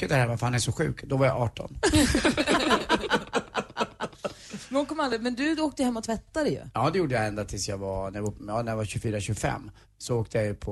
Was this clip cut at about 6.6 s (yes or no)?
no